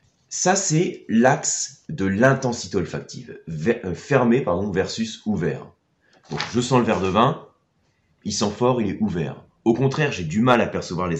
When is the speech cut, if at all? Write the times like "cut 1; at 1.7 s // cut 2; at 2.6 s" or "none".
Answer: none